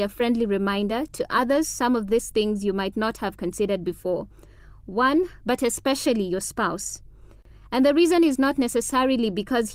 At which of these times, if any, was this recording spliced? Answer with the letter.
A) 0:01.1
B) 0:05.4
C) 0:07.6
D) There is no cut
B